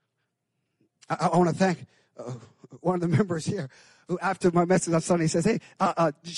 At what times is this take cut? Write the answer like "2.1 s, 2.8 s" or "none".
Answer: none